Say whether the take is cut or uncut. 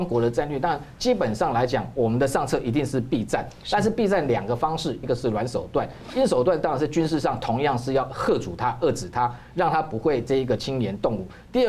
cut